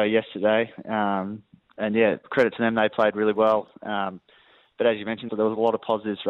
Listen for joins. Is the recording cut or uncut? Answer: cut